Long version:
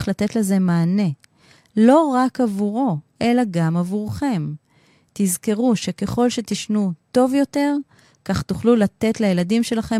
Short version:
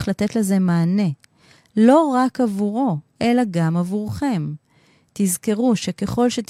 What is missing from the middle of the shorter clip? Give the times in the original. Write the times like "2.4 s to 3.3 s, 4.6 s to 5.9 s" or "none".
none